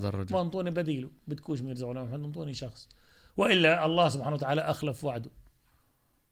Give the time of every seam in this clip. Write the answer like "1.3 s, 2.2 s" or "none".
none

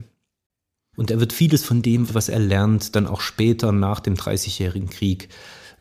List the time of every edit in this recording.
0.9 s, 2.1 s

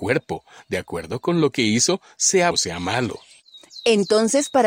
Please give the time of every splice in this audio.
2.5 s

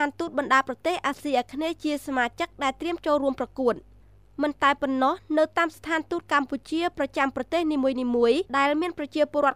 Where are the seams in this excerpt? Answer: 8.5 s

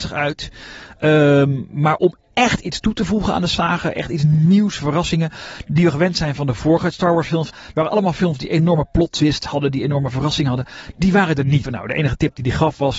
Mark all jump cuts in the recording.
7.5 s, 11.6 s

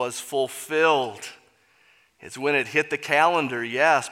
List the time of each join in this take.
none

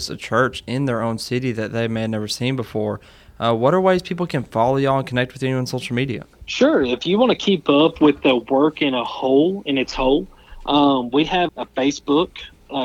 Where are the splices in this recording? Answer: 6.3 s, 11.5 s

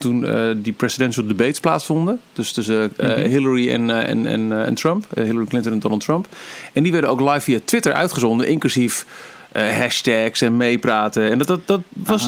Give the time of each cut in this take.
none

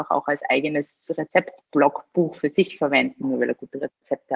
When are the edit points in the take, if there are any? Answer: 1.6 s, 3.2 s

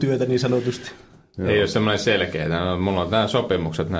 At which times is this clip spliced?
none

